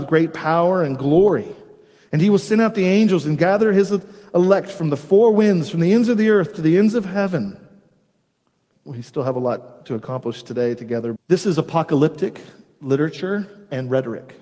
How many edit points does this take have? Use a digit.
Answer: 2